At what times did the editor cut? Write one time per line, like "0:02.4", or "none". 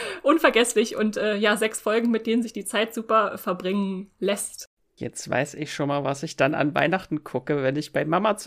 none